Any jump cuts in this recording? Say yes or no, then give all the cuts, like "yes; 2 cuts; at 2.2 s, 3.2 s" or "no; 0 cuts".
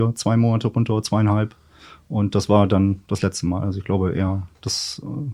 no; 0 cuts